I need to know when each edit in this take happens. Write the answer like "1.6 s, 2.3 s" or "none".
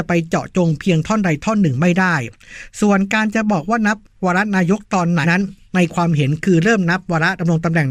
5.2 s